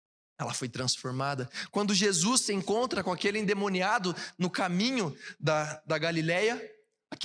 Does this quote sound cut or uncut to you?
uncut